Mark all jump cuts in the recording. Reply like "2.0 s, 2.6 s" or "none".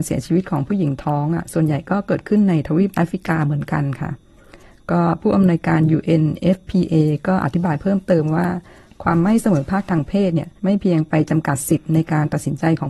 10.6 s